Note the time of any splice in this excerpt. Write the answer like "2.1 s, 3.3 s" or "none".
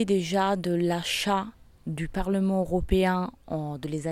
none